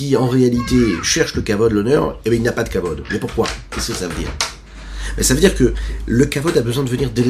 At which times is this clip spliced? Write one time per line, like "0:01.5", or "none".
none